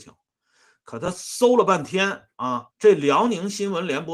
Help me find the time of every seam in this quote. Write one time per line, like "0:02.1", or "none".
0:02.7